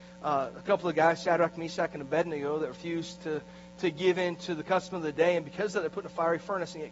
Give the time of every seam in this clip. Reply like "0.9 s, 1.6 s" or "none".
none

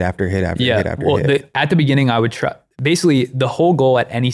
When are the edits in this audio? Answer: none

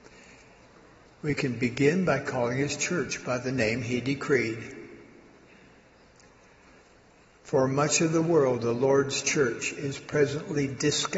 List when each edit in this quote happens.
1.0 s

